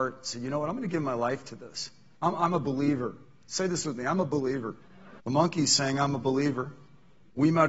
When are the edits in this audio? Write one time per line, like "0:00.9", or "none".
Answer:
0:05.2